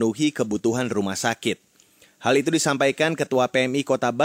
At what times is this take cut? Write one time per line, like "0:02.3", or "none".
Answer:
none